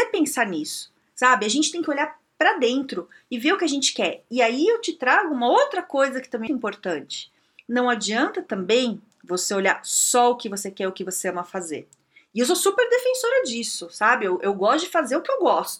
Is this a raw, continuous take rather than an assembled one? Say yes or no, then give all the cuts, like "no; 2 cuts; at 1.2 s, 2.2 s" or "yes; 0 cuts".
no; 1 cut; at 6.5 s